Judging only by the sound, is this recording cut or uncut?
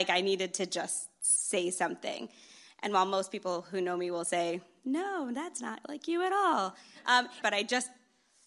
cut